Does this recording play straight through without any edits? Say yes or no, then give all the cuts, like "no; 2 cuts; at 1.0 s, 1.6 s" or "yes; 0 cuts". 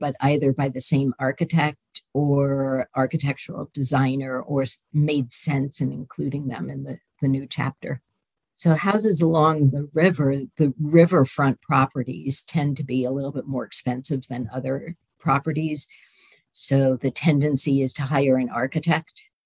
yes; 0 cuts